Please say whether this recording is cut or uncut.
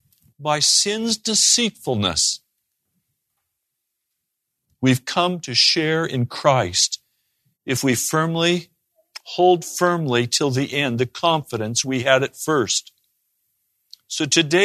uncut